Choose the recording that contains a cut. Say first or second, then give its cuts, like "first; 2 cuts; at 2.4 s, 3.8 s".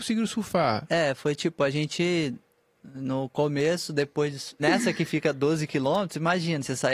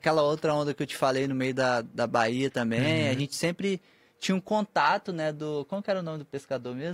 first; 1 cut; at 4.6 s